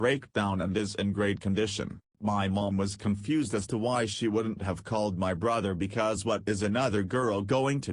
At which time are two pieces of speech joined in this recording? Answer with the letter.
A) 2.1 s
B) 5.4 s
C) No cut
A